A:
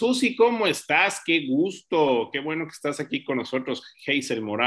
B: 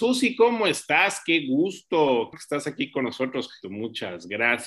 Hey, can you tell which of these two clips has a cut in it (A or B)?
B